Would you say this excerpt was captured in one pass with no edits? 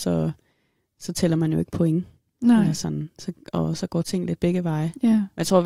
yes; 0 cuts

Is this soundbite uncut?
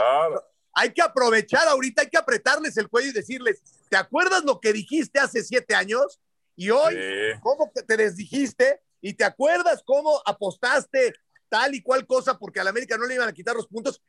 yes; 0 cuts

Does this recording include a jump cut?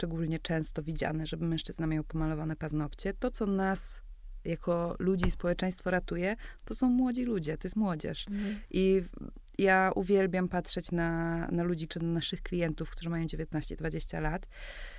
yes; 1 cut; at 11.9 s

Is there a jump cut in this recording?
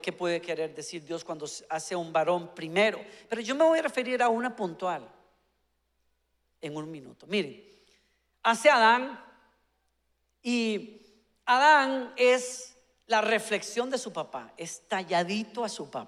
no; 0 cuts

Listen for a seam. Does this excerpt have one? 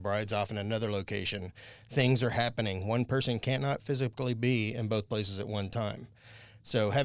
no; 0 cuts

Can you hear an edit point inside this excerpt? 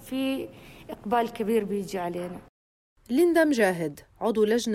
no; 0 cuts

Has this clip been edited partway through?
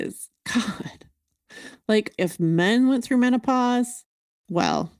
yes; 1 cut; at 2.2 s

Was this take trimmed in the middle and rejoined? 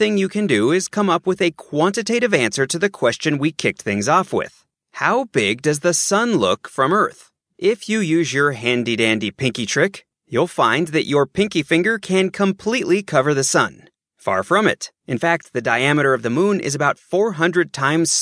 yes; 2 cuts; at 7.5 s, 14.0 s

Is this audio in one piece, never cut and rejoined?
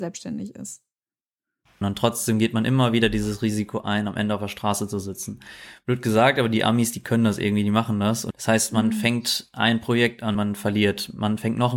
no; 3 cuts; at 1.8 s, 8.3 s, 10.3 s

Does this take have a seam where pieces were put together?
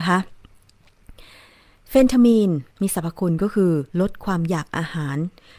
yes; 2 cuts; at 2.7 s, 3.9 s

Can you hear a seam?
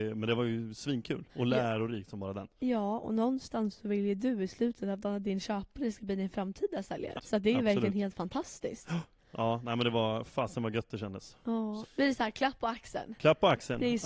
yes; 3 cuts; at 1.3 s, 7.2 s, 11.8 s

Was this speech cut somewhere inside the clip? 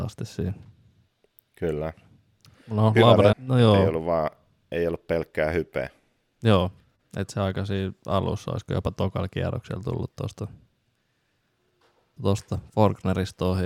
yes; 2 cuts; at 3.3 s, 12.2 s

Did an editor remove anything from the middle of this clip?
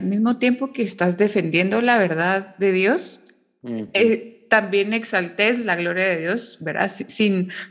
no; 0 cuts

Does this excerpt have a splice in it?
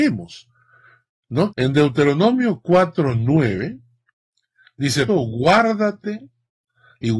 yes; 2 cuts; at 1.5 s, 5.1 s

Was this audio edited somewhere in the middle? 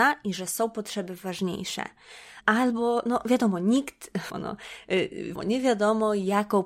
yes; 3 cuts; at 2.4 s, 4.3 s, 5.4 s

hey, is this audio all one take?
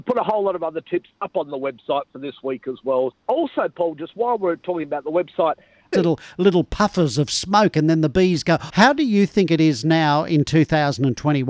no; 3 cuts; at 3.1 s, 5.9 s, 8.7 s

